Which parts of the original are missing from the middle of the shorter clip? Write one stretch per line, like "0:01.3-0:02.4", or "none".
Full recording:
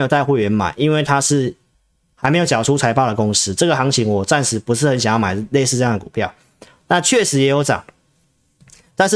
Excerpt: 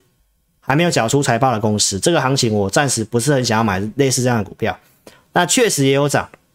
none